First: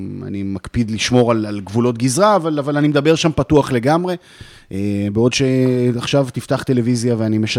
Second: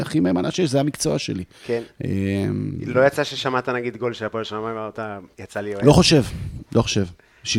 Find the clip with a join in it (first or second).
second